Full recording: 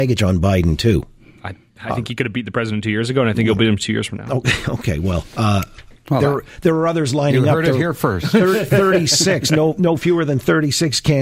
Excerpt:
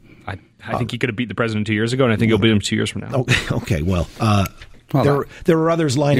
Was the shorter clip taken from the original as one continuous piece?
yes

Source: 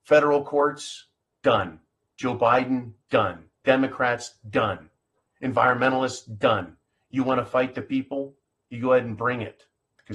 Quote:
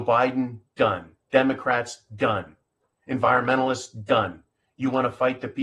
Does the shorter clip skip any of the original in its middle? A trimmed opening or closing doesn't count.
no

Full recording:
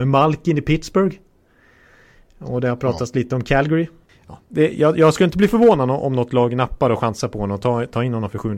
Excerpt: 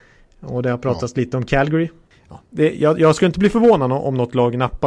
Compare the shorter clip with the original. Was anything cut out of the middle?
no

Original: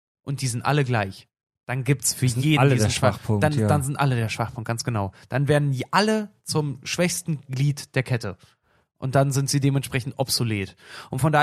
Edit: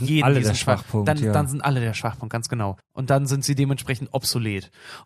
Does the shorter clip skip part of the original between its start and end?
yes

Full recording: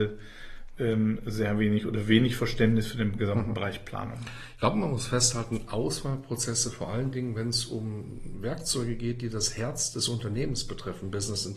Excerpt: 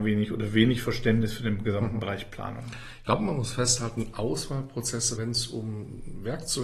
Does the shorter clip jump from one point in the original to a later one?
yes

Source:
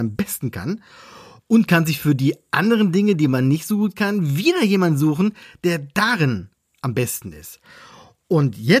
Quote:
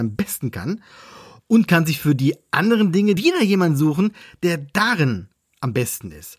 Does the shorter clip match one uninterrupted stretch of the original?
no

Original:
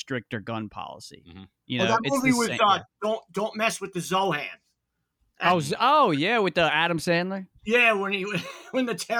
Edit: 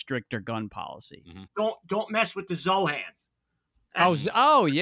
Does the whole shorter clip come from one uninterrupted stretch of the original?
no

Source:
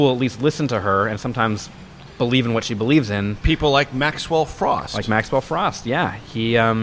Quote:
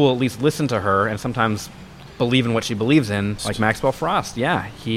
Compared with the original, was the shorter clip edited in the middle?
yes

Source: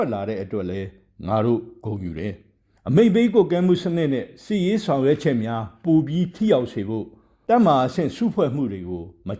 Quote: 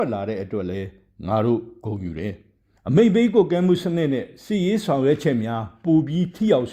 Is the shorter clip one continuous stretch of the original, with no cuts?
yes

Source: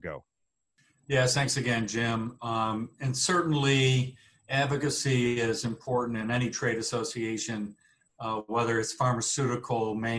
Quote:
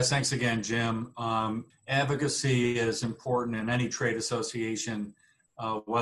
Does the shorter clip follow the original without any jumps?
no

